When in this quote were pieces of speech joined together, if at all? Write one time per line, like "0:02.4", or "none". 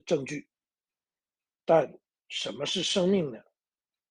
none